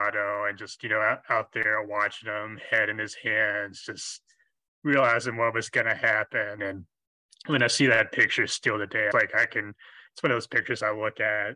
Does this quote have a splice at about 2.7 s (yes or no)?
no